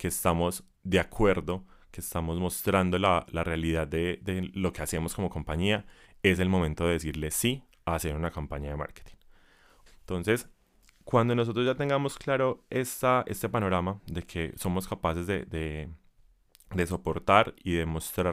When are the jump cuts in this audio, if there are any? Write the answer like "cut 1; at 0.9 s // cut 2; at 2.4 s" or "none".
cut 1; at 9.9 s